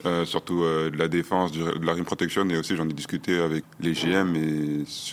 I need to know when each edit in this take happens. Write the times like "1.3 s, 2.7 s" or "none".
3.6 s